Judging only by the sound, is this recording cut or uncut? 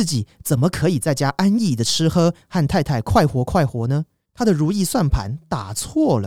cut